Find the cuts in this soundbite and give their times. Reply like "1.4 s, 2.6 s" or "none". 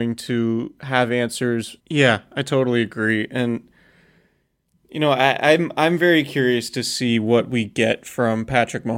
1.8 s